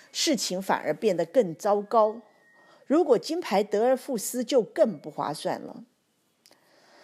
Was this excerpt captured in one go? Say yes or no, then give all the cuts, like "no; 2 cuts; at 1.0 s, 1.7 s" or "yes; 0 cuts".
yes; 0 cuts